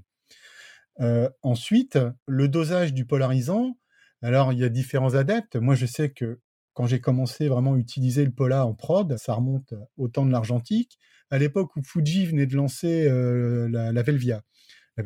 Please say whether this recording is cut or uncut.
cut